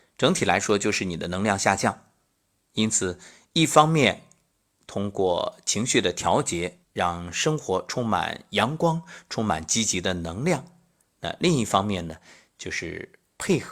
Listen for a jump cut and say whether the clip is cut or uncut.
cut